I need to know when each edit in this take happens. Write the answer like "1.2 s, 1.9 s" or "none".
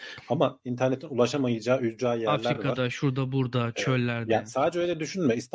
none